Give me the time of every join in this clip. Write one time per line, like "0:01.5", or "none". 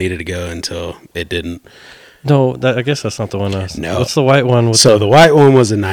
none

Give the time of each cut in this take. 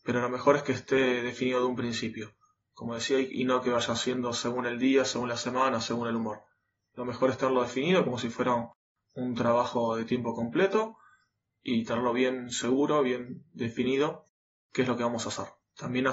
none

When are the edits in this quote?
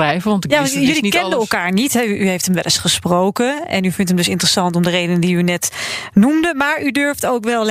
none

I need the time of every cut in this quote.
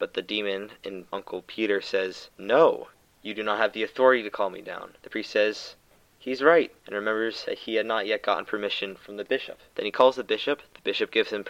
0:05.0

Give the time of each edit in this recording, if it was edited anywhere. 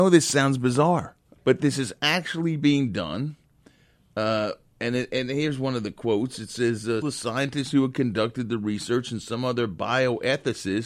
0:01.4
0:07.0

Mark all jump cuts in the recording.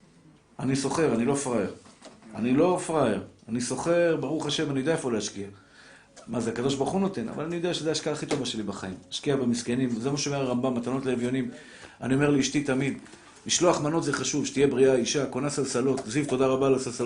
none

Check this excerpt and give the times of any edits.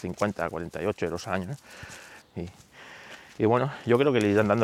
0:02.2

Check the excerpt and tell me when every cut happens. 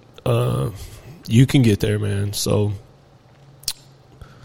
none

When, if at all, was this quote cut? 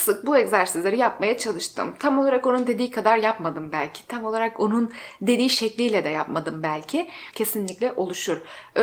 0:07.3

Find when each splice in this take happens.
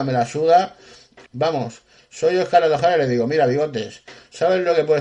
0:01.3

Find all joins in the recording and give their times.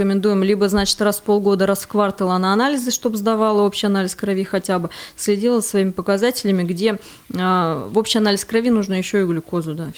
none

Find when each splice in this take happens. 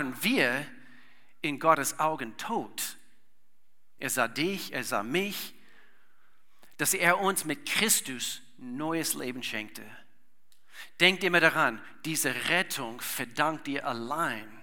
0:04.0

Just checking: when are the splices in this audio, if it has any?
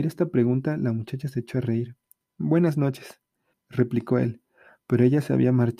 0:03.5

